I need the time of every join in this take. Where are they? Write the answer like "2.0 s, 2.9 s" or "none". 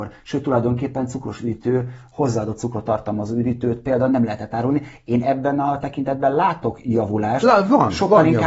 none